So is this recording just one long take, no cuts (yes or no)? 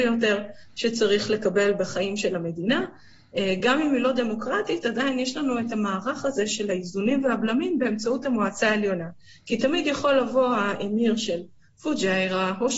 yes